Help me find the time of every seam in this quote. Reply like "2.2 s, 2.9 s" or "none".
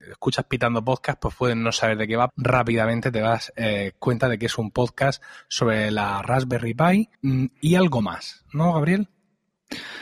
2.3 s, 7.1 s